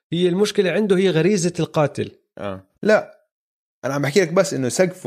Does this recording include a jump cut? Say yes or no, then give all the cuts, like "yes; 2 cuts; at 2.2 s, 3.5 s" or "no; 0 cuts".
yes; 1 cut; at 2.7 s